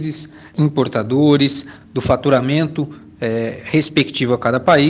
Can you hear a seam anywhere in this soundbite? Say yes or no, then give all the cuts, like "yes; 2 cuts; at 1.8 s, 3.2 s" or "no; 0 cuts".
no; 0 cuts